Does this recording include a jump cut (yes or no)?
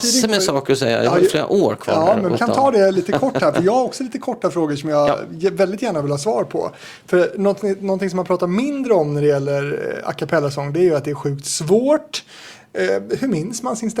yes